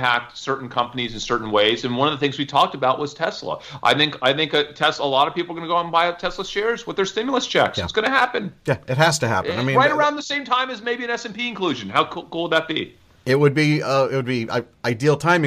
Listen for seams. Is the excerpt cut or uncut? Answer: uncut